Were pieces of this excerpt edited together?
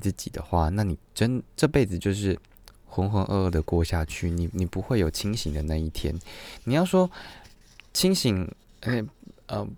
no; 0 cuts

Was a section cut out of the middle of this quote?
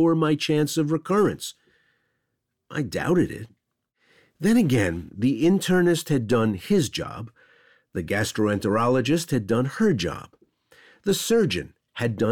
no; 0 cuts

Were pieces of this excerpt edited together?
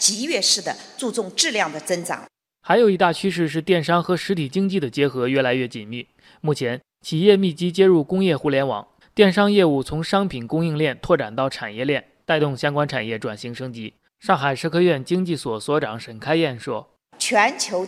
yes; 2 cuts; at 9.0 s, 14.1 s

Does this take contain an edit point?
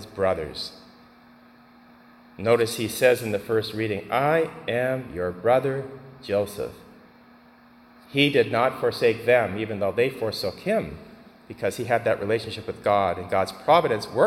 no; 0 cuts

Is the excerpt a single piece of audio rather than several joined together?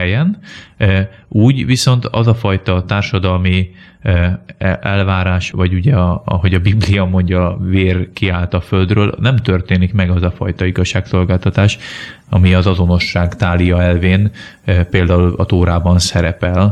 no; 1 cut; at 5.5 s

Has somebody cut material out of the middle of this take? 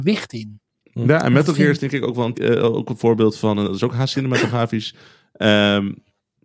yes; 1 cut; at 2.3 s

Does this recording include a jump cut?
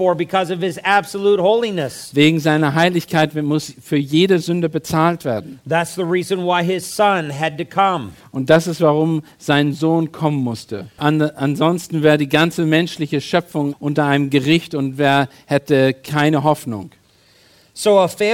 yes; 2 cuts; at 11.0 s, 13.7 s

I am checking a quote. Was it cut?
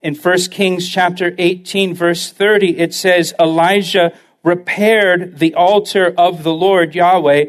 no; 0 cuts

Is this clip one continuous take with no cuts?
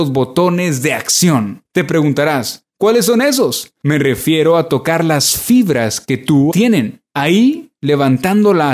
no; 1 cut; at 6.5 s

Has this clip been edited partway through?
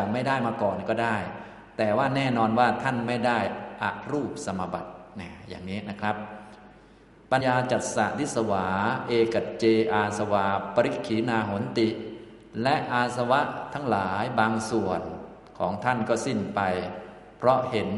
yes; 1 cut; at 7.4 s

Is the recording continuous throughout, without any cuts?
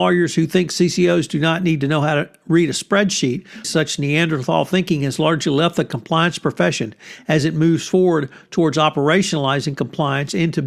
no; 1 cut; at 3.6 s

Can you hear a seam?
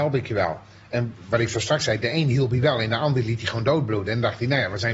no; 0 cuts

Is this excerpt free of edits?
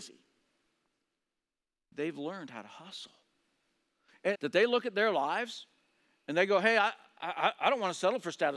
no; 1 cut; at 4.3 s

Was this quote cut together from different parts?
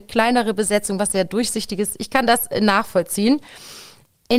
no; 0 cuts

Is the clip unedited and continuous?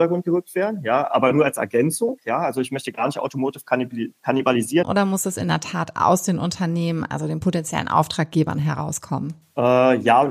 no; 1 cut; at 4.8 s

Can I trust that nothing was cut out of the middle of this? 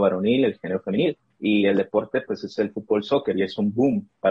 yes; 0 cuts

